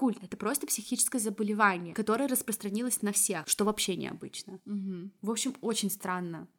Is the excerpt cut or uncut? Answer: cut